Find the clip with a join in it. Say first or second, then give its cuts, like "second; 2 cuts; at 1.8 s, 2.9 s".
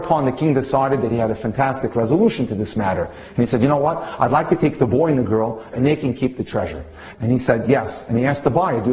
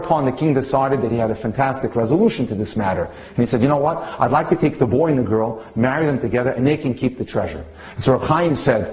first; 2 cuts; at 5.7 s, 7.1 s